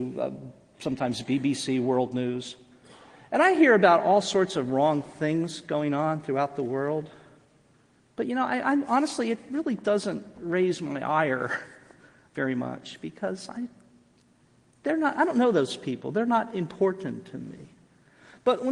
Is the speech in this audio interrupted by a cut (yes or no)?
no